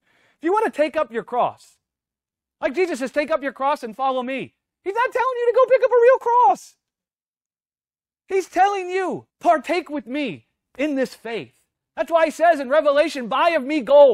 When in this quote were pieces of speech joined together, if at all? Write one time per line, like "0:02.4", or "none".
0:09.3